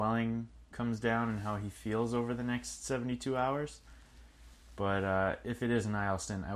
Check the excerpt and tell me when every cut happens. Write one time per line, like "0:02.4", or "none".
none